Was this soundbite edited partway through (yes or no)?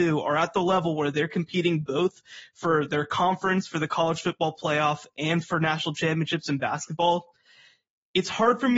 no